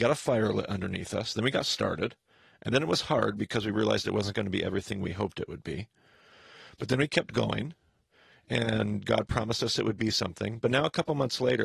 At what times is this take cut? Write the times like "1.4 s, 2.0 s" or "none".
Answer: none